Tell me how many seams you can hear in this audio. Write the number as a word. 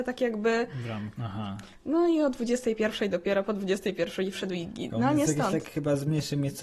two